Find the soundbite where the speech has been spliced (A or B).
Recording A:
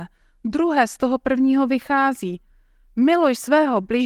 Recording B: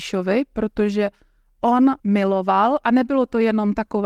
B